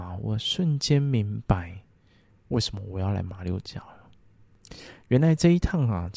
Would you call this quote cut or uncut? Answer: uncut